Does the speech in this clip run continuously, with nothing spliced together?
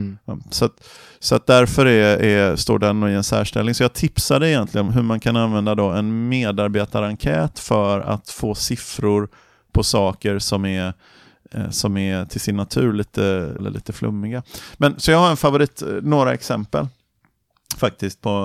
no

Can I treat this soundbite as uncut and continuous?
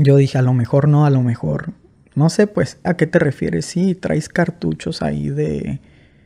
no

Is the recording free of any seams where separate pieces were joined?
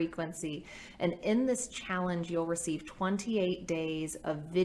yes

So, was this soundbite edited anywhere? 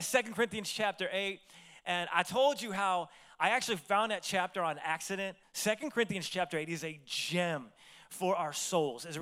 yes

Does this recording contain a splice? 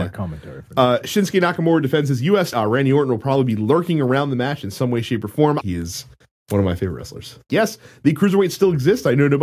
yes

